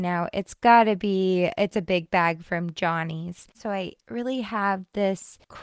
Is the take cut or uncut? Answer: cut